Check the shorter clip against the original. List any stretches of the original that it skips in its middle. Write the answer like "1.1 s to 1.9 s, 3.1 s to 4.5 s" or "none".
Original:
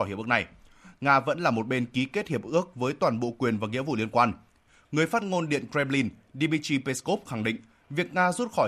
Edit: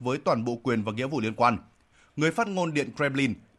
none